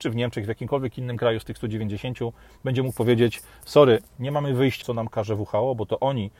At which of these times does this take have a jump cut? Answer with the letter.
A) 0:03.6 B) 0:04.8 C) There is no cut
B